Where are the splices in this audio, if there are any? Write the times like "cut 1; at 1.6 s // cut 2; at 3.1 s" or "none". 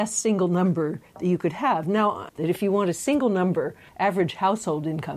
cut 1; at 2.3 s // cut 2; at 3.9 s